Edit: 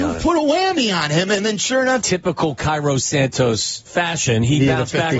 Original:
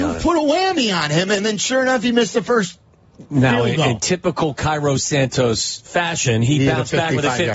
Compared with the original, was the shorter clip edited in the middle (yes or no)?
yes